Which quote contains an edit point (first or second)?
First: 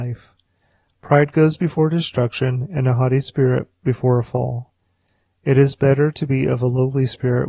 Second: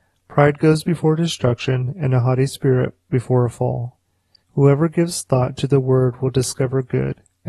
second